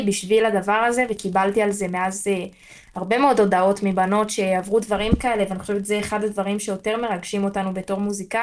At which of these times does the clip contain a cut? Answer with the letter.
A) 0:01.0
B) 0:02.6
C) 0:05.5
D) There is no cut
D